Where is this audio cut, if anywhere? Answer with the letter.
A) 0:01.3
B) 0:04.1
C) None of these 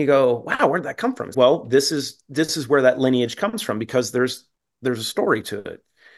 A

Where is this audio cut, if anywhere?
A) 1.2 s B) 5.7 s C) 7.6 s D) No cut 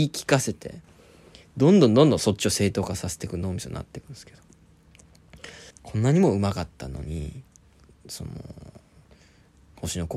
B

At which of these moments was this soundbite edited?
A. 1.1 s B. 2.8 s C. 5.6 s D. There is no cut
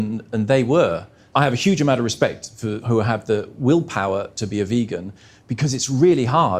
B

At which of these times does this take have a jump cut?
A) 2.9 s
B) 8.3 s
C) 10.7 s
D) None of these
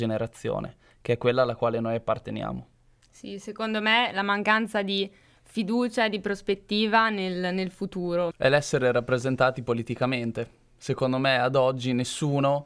B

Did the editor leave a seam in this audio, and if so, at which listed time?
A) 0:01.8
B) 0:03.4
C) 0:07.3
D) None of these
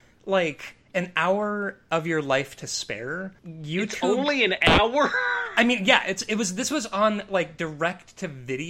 B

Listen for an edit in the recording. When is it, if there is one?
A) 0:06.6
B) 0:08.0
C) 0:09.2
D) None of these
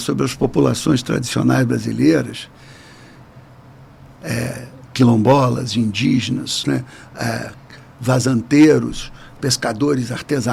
A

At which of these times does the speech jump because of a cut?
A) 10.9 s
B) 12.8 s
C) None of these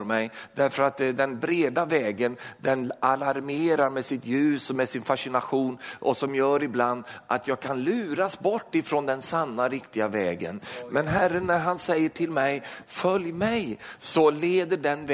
B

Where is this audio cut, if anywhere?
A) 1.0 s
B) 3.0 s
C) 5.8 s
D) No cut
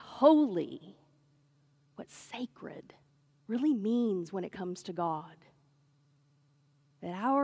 D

